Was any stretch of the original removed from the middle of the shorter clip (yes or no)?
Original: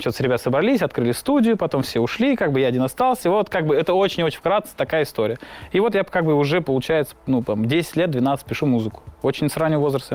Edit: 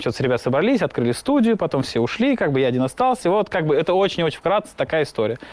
no